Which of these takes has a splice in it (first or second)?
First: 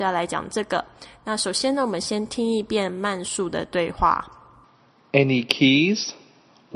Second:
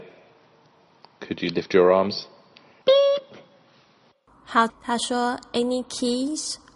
second